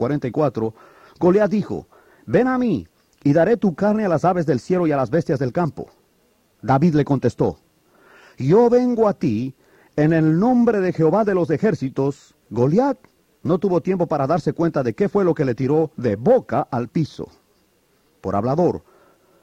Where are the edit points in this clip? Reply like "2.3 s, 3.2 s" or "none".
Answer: 12.4 s